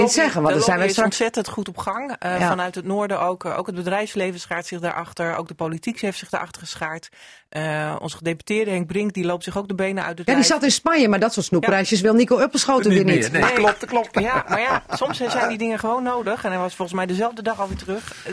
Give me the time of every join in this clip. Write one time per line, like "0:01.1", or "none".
none

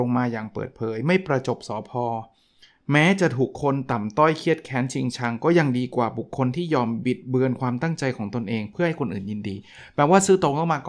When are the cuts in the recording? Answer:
none

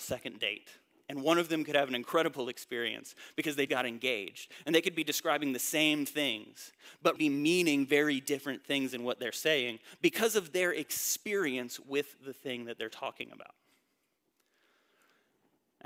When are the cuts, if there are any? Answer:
0:03.7
0:07.2

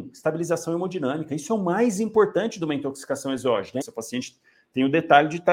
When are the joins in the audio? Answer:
0:03.8

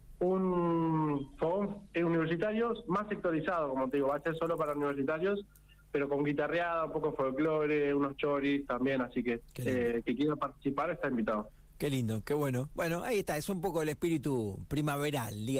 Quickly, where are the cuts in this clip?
none

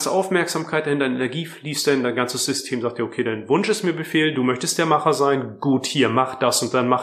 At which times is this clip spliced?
none

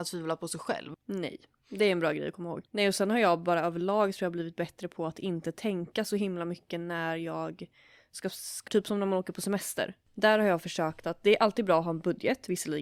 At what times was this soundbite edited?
0:00.9
0:02.7
0:08.7

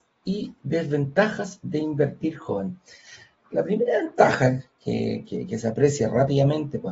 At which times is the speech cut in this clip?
0:05.3

